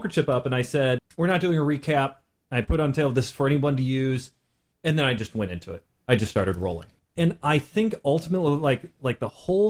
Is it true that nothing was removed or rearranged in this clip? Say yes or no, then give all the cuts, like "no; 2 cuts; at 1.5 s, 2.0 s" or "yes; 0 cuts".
yes; 0 cuts